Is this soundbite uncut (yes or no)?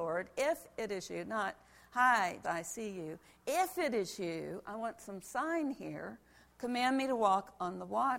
no